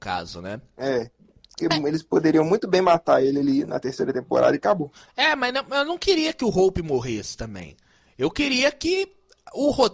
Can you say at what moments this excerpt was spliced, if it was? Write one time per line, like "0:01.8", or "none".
0:05.1